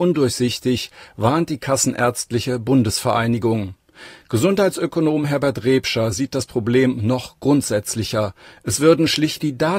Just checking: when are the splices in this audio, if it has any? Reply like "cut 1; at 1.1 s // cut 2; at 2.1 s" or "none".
none